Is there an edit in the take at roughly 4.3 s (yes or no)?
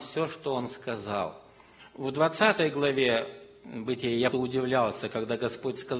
yes